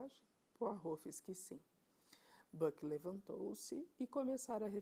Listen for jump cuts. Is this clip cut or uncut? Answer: cut